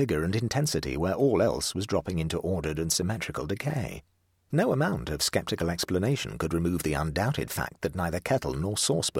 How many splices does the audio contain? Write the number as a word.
one